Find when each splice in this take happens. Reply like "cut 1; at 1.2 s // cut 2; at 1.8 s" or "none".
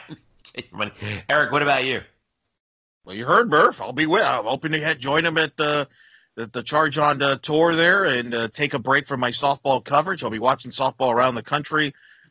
none